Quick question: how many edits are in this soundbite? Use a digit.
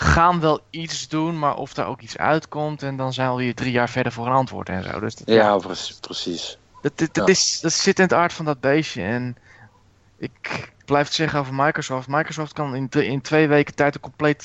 0